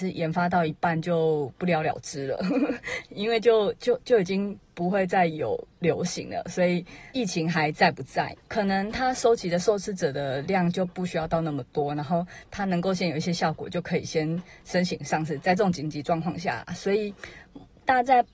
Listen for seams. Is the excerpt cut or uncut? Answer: cut